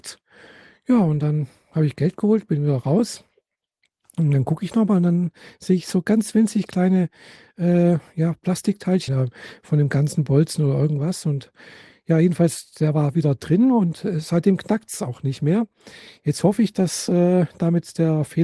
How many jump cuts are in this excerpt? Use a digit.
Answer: 1